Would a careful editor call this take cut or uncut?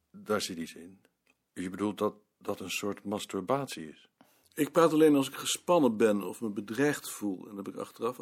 cut